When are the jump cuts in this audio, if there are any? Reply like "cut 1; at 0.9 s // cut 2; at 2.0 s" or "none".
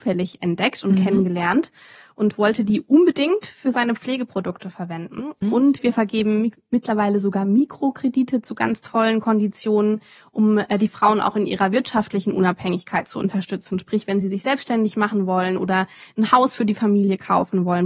cut 1; at 5.4 s